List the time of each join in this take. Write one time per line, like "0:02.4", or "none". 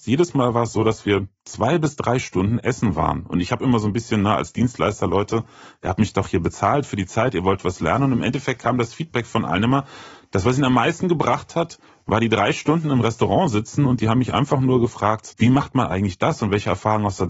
0:15.3